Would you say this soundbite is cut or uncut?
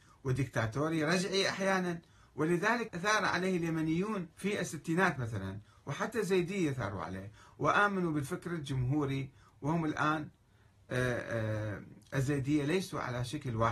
cut